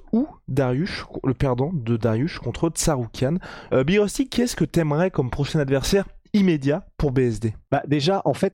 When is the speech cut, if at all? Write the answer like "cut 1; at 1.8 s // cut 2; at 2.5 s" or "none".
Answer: cut 1; at 3.7 s